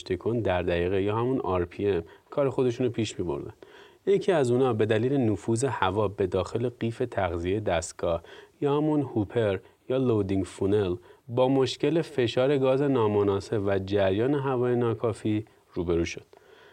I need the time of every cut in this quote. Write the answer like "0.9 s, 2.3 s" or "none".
none